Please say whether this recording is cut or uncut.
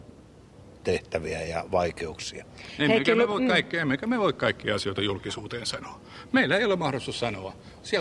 uncut